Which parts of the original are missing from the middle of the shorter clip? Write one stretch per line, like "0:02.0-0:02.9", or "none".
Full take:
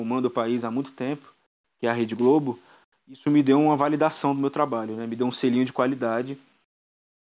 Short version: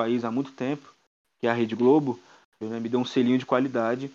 0:03.0-0:04.9